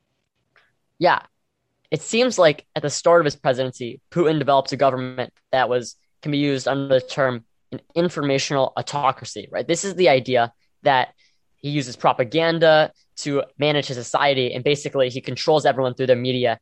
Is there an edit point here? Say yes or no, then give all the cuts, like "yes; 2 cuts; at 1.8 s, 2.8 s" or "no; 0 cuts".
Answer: no; 0 cuts